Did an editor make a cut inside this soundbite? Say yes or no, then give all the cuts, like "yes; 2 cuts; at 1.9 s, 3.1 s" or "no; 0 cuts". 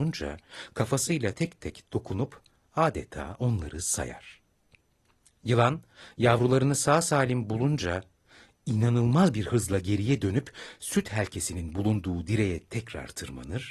no; 0 cuts